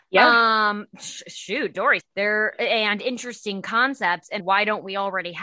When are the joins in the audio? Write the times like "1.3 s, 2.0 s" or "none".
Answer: 2.0 s, 4.4 s